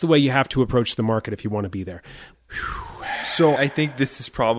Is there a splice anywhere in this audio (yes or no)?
yes